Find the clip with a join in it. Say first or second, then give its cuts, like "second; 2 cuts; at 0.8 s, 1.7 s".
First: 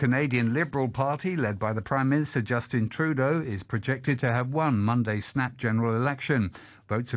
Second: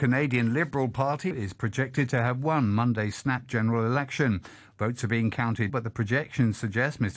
second; 2 cuts; at 1.3 s, 5.7 s